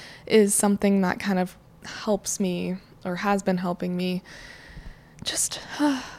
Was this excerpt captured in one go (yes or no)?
yes